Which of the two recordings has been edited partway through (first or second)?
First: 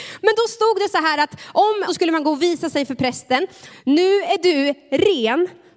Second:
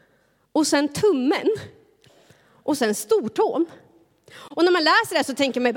first